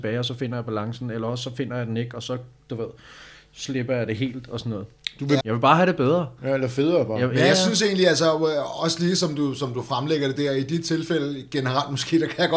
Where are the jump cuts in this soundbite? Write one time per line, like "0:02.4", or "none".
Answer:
0:05.4